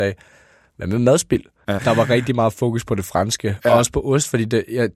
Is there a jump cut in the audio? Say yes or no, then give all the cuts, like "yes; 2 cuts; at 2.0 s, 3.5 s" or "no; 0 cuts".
yes; 1 cut; at 1.8 s